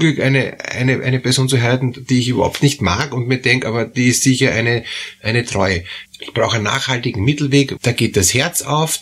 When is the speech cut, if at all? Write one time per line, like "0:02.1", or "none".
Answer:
0:06.1
0:07.8